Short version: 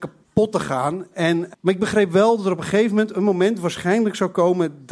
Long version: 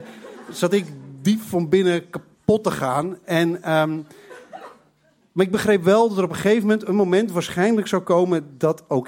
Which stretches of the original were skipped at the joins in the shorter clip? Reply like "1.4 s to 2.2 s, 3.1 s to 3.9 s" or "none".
3.6 s to 5.3 s